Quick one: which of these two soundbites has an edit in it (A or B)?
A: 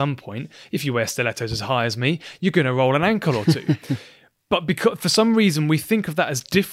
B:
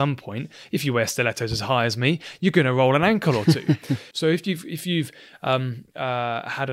B